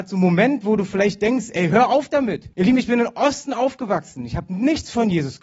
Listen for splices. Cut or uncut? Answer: cut